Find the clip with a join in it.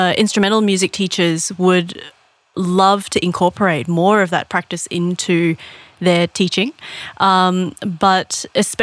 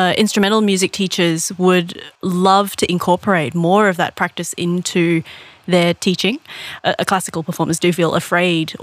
second; 2 cuts; at 2.2 s, 6.8 s

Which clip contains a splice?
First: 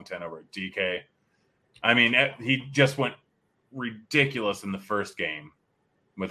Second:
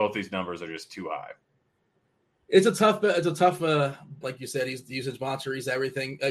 second; 1 cut; at 4.2 s

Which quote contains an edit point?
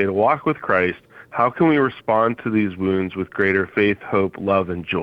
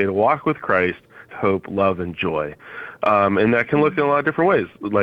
second; 1 cut; at 1.3 s

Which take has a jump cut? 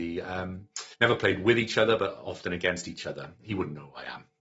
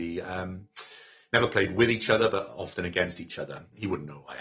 first; 1 cut; at 0.9 s

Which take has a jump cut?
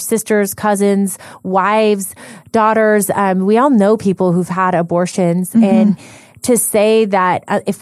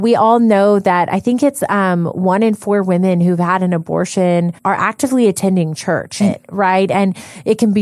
second; 2 cuts; at 4.6 s, 6.2 s

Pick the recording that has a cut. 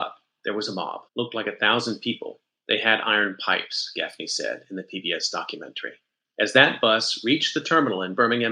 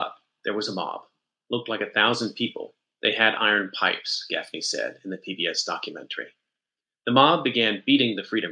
first; 2 cuts; at 1.1 s, 6.2 s

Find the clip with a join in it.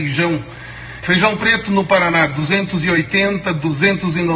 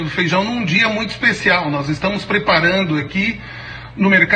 first; 1 cut; at 1.0 s

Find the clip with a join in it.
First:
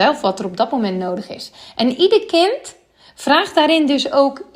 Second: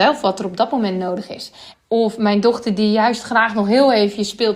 second; 1 cut; at 1.7 s

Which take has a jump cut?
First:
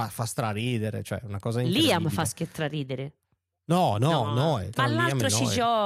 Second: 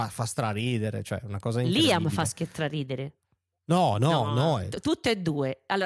first; 1 cut; at 4.7 s

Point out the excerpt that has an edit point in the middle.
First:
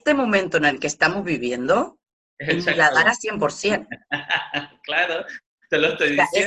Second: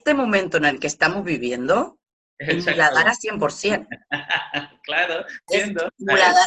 second; 1 cut; at 5.5 s

